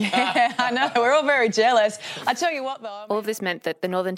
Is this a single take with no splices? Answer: yes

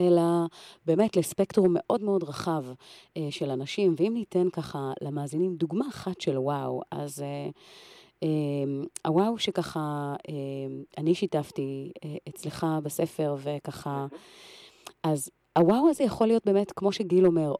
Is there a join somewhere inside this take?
no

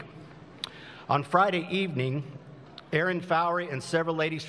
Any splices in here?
no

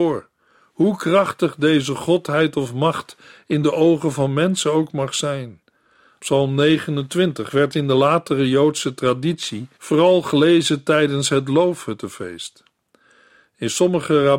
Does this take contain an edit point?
yes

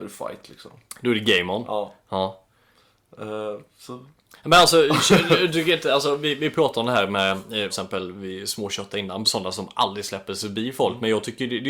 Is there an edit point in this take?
yes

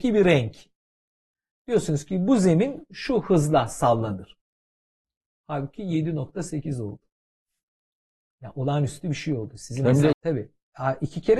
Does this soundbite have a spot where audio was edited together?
yes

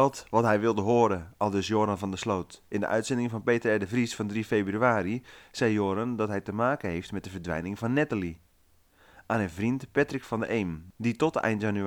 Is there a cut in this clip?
no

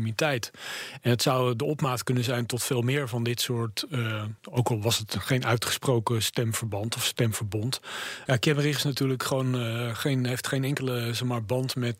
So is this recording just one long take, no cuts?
no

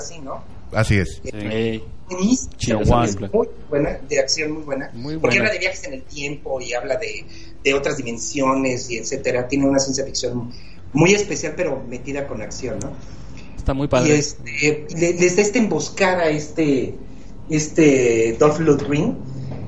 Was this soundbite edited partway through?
yes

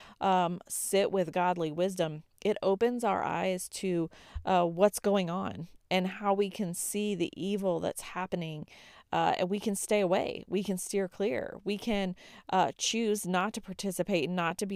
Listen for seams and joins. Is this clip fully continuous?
yes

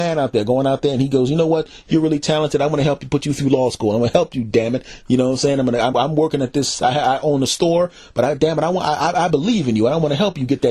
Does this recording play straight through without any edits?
no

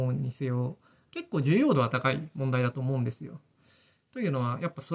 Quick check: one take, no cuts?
yes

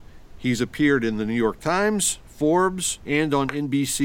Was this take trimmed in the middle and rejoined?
yes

